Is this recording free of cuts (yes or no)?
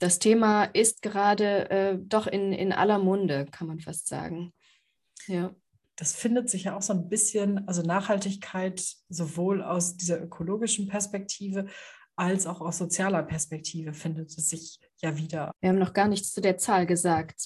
no